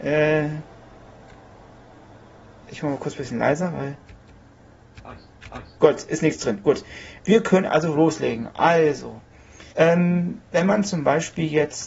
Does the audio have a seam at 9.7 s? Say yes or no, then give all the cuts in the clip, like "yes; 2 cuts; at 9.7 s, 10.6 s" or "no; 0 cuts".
yes; 1 cut; at 9.7 s